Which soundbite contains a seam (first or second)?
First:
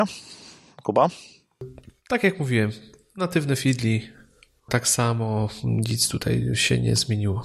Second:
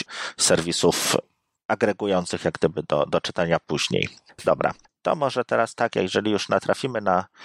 second